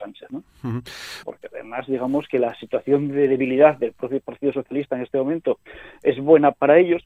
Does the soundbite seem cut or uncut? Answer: cut